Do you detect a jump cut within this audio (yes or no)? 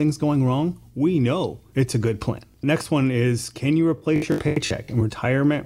no